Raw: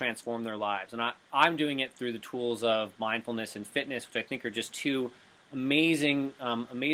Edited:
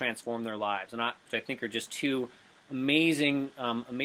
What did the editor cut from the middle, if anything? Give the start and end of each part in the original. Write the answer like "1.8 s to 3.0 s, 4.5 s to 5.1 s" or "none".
1.3 s to 4.1 s